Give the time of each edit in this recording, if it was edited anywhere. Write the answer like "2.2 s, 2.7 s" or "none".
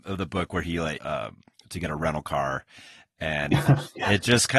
1.0 s